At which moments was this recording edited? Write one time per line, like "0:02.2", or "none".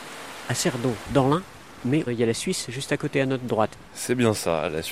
0:01.0